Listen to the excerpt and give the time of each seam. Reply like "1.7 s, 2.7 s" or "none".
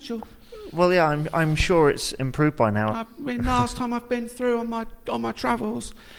2.9 s